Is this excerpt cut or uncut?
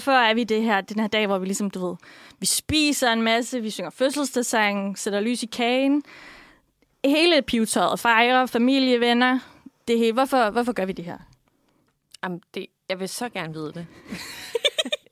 uncut